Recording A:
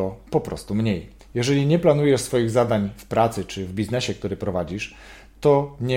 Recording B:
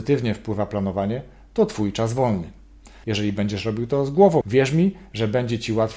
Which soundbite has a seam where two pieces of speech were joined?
B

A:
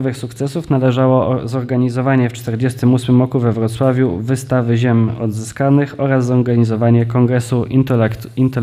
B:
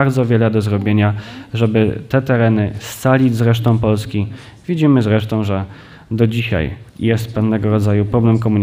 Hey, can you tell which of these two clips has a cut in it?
B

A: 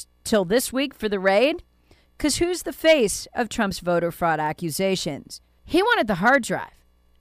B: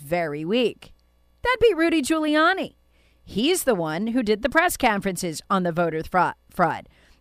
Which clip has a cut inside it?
A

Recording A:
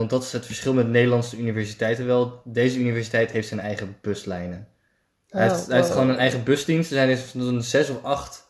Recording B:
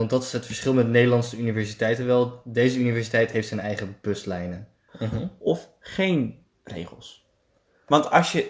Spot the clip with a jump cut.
B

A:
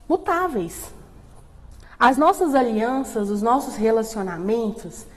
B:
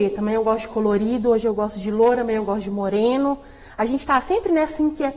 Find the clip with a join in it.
A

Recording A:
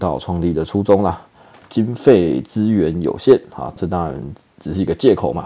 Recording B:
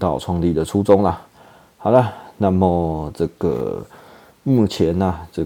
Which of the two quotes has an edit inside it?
A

